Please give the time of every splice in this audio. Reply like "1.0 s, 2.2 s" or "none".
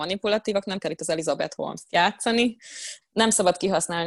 3.0 s